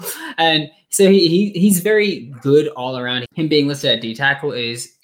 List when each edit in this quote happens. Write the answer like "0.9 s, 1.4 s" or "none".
3.2 s

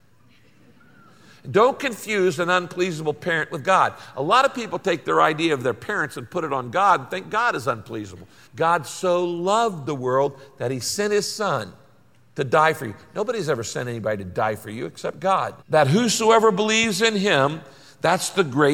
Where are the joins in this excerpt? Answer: 8.5 s, 15.6 s

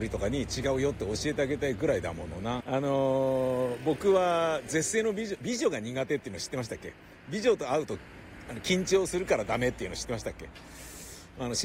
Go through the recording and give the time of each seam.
2.6 s

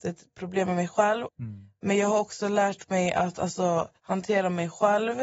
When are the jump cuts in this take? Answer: 1.3 s, 4.0 s

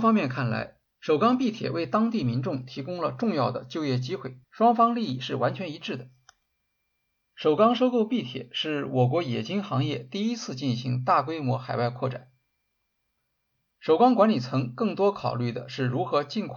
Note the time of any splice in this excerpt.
0.9 s, 4.4 s

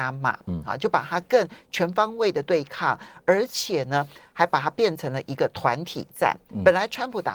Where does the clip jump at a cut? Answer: none

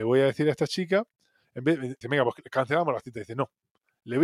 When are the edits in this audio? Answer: 2.0 s

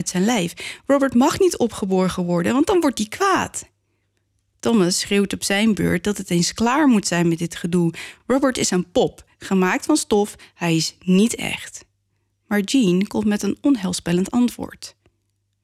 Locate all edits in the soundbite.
none

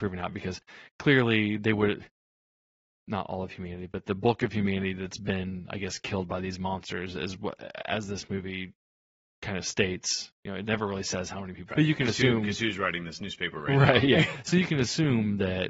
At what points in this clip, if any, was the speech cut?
3.0 s, 11.7 s

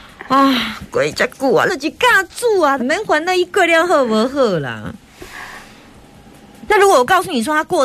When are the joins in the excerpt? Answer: 1.7 s, 2.8 s, 6.7 s

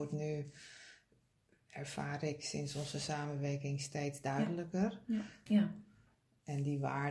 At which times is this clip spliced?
5.5 s

